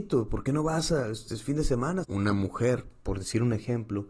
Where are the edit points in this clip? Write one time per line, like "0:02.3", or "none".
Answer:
0:02.0